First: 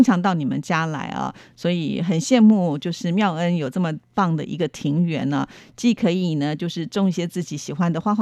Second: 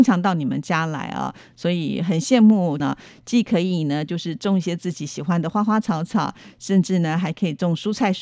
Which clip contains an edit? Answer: second; 1 cut; at 2.8 s

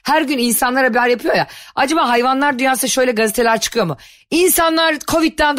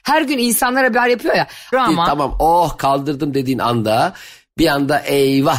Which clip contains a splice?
second; 1 cut; at 1.7 s

